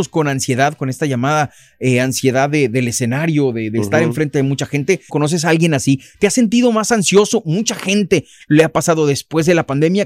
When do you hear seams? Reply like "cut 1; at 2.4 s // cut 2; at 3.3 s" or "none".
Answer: cut 1; at 5.1 s